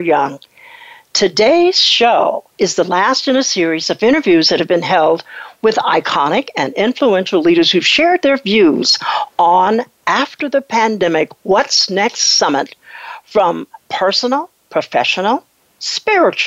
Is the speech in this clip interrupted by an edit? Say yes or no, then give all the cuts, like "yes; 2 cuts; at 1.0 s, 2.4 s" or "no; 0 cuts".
no; 0 cuts